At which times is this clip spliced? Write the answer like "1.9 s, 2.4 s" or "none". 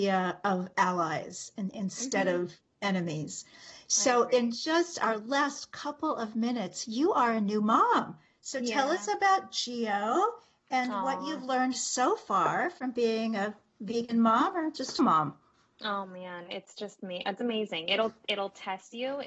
15.0 s